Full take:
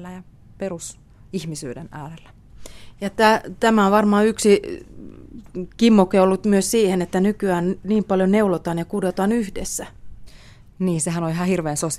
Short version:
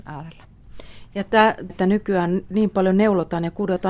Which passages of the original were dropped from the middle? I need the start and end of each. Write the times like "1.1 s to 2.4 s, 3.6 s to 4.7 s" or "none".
3.6 s to 7.0 s